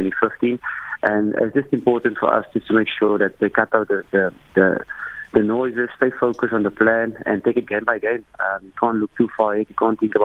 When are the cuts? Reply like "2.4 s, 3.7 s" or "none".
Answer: none